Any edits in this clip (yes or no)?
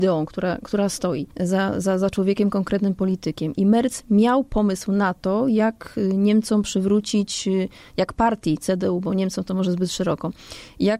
yes